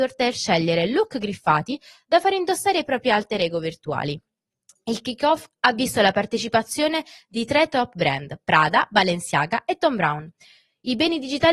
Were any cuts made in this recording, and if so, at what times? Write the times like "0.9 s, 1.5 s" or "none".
none